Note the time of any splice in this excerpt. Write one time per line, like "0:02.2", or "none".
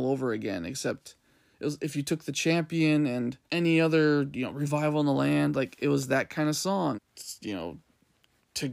0:03.4
0:06.9

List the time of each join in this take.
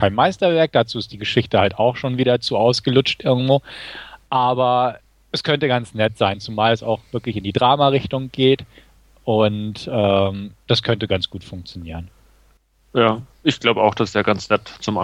none

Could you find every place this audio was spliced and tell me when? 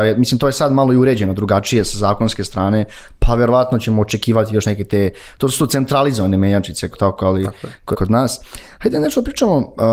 0:06.9
0:07.9

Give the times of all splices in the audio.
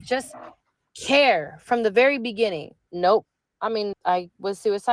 0:02.9
0:03.9

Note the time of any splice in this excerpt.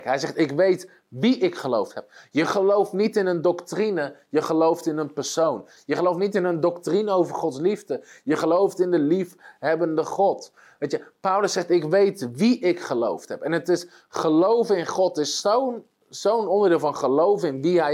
0:05.8

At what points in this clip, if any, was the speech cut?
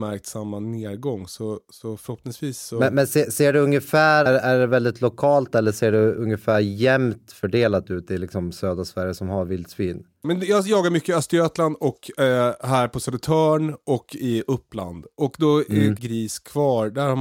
0:04.3
0:10.2
0:16.0

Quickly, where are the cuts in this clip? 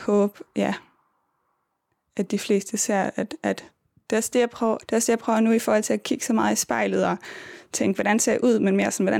0:04.8

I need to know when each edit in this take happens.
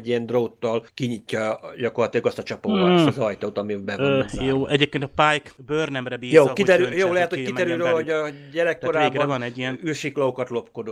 none

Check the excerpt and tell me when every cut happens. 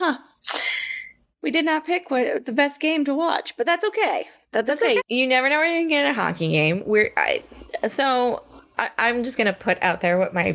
0:05.0

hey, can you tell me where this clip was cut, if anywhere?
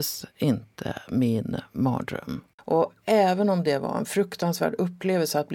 0:02.6

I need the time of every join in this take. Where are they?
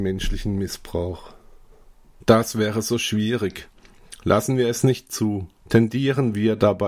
0:05.6

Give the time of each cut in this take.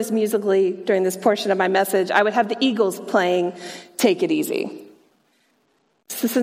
none

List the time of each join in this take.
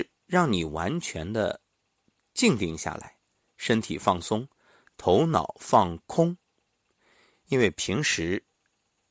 none

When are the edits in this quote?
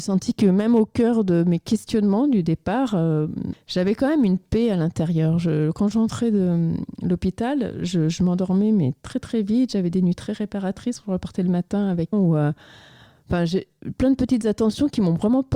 0:03.5
0:12.1

